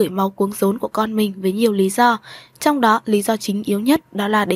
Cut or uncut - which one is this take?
uncut